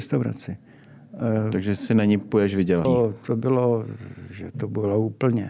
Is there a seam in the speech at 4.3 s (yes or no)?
no